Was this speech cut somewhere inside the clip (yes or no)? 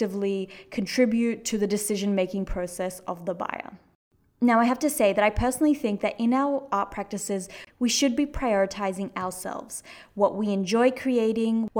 no